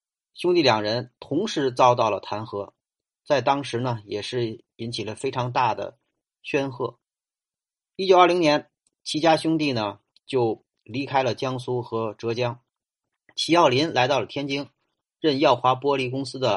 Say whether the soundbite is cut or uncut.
uncut